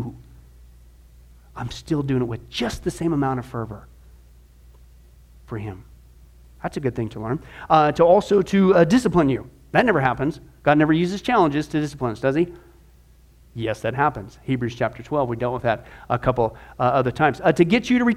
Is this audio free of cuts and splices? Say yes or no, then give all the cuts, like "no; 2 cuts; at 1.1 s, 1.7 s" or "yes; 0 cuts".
yes; 0 cuts